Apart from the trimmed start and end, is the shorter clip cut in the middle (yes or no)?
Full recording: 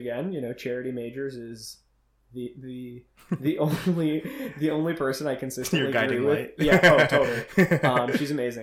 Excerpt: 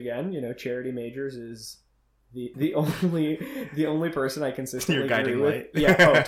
yes